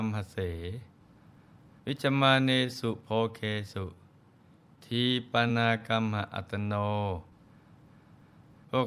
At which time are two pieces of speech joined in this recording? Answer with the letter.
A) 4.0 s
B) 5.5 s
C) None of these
B